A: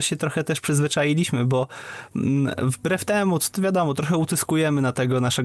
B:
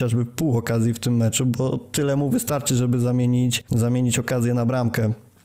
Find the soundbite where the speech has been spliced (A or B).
B